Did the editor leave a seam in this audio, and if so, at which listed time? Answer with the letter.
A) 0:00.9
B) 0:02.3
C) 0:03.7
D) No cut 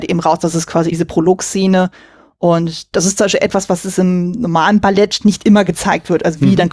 A